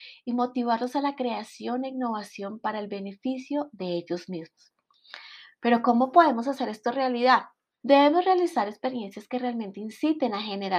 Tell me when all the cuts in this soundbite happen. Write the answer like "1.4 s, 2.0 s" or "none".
7.8 s